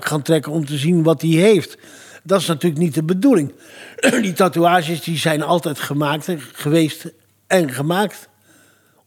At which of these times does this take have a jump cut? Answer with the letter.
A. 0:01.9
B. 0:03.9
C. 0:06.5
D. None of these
D